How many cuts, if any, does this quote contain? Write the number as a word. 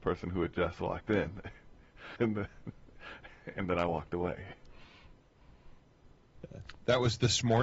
one